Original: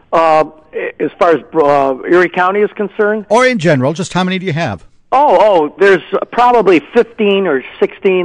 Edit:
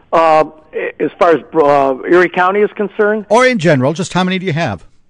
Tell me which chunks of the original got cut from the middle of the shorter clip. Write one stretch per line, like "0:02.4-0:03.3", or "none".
none